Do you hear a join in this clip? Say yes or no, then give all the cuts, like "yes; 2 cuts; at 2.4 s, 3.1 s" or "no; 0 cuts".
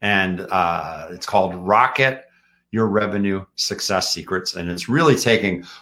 no; 0 cuts